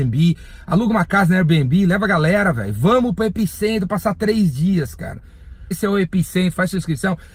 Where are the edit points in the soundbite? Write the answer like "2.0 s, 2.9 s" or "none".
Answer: 5.7 s